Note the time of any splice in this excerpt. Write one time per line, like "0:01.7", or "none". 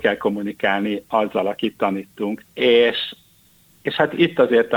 0:02.4